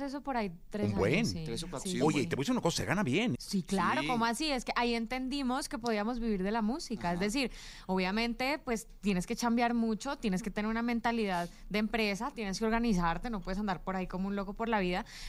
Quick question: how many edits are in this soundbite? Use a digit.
1